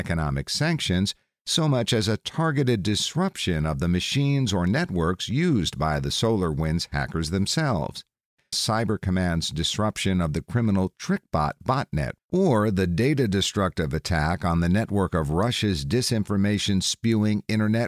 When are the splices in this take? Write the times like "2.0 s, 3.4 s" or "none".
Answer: 8.5 s, 12.2 s